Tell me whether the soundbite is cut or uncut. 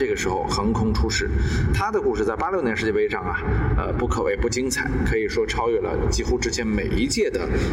uncut